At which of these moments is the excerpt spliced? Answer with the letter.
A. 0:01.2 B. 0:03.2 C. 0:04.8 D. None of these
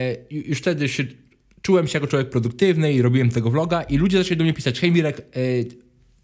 D